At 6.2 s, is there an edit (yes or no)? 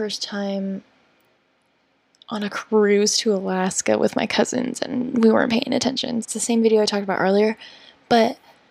yes